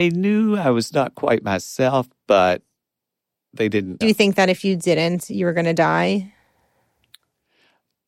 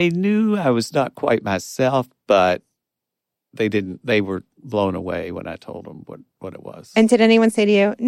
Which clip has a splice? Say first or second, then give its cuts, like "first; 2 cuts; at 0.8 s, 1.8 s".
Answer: first; 1 cut; at 4.0 s